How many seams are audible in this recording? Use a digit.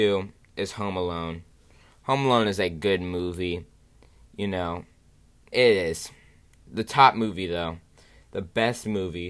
1